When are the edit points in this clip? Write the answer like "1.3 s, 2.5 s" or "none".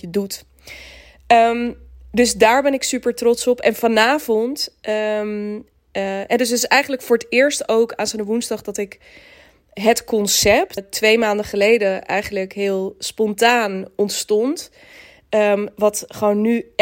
10.8 s